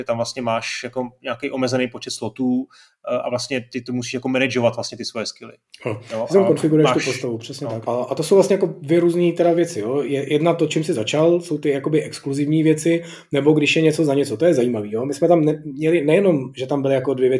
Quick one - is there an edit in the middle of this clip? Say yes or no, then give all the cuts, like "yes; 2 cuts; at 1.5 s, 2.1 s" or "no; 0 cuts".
yes; 1 cut; at 7.9 s